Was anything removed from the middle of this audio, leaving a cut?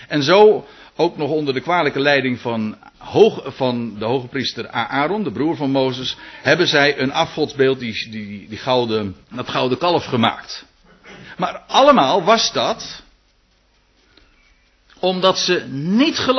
yes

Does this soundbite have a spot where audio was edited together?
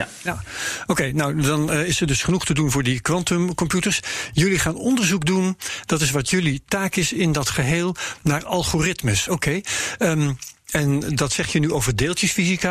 yes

